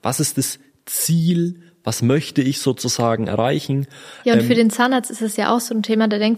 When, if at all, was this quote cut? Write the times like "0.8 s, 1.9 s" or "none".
4.2 s

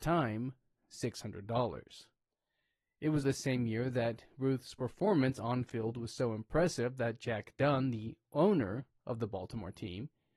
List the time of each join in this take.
3.2 s

